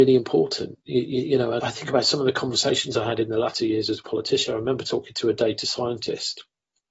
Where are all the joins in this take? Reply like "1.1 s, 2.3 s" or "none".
1.6 s